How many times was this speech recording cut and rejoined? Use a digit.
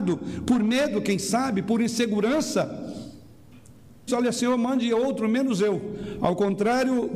1